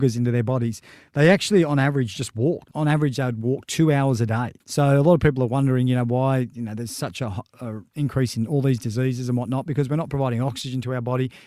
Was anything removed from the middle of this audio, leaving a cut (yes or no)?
yes